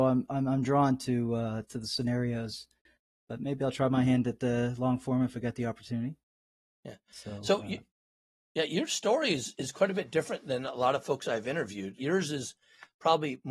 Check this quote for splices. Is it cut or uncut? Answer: cut